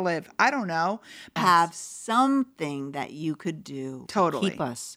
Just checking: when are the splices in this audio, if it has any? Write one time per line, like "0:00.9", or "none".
0:01.4
0:04.1